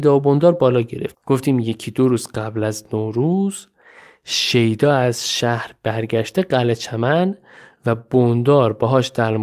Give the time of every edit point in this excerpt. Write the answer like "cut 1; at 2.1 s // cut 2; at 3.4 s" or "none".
cut 1; at 1.1 s